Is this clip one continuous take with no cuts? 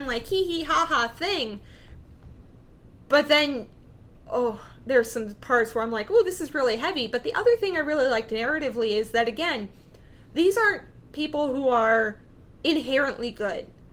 yes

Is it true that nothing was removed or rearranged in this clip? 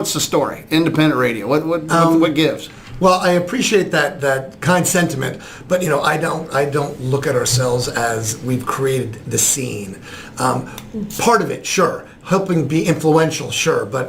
yes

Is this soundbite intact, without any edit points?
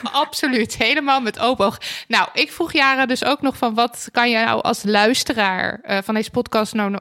yes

